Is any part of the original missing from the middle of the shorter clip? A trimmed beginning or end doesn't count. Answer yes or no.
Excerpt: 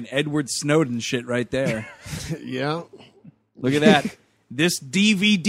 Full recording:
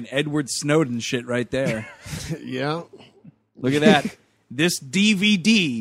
no